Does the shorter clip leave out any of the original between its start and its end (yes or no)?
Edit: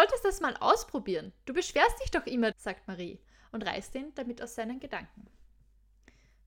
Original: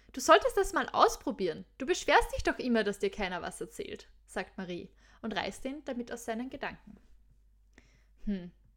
yes